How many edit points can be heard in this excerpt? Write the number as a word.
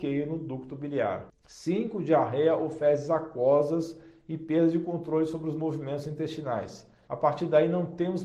one